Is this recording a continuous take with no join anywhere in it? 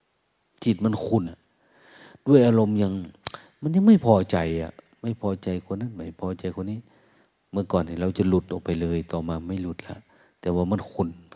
no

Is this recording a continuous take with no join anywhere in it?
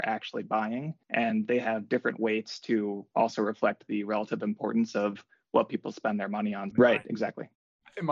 no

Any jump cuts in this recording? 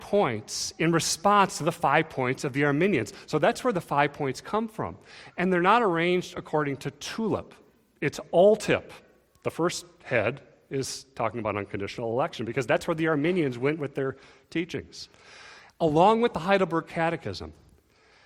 no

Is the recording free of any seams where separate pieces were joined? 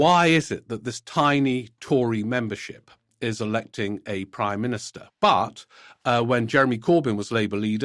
no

